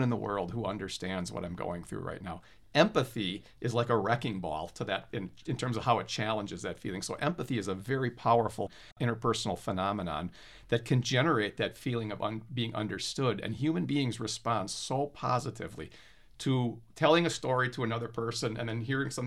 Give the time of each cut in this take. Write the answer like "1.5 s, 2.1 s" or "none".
none